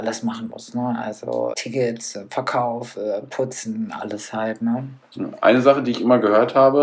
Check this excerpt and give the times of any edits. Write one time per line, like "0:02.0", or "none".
0:01.5

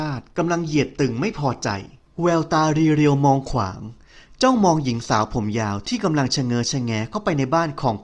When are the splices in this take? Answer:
none

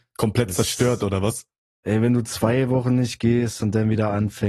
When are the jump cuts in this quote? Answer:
none

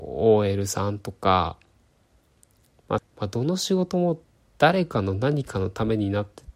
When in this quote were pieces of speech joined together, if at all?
0:03.0

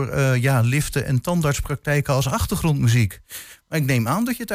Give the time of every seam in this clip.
none

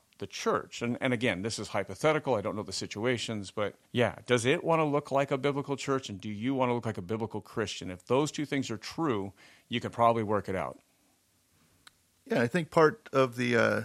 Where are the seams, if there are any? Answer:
0:03.8

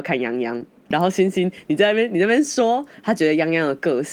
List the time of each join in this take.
0:00.9

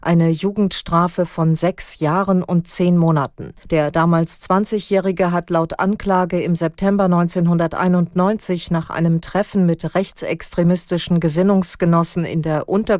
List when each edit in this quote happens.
0:03.6

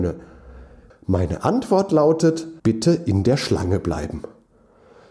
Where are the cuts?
0:00.9
0:02.6

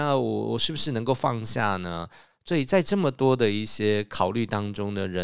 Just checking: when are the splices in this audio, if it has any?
none

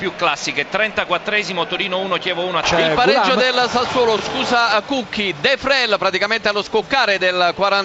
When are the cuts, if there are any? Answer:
none

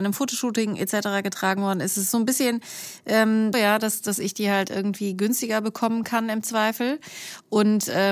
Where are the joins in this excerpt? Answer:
0:03.5

